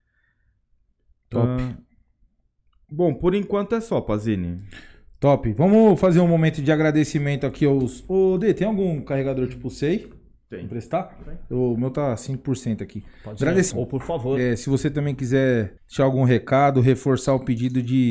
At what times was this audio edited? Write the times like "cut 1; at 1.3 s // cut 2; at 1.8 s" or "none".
cut 1; at 13.7 s // cut 2; at 15.8 s